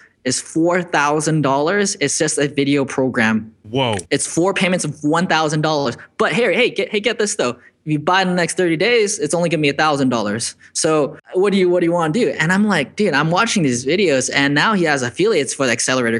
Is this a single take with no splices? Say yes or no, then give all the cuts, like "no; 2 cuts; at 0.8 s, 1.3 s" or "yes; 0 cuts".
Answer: yes; 0 cuts